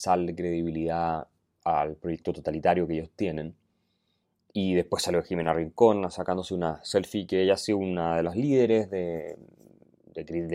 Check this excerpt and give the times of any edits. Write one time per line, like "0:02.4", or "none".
none